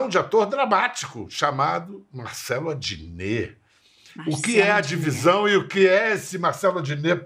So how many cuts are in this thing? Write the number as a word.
zero